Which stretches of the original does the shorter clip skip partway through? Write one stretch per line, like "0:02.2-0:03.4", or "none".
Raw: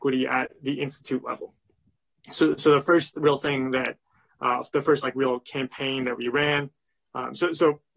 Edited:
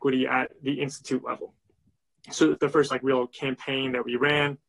0:02.6-0:04.7